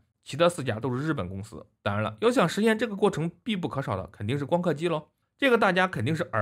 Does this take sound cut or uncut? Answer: cut